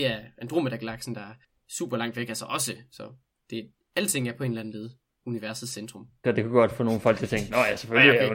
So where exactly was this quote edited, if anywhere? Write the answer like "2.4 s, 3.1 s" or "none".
6.2 s